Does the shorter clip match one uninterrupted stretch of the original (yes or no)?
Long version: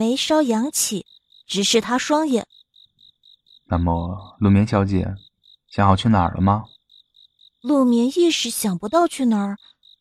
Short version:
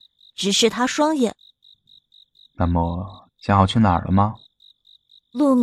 no